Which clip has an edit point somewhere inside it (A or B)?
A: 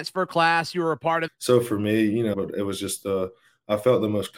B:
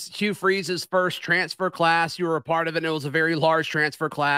A